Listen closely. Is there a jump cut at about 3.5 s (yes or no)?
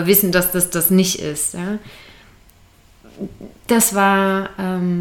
no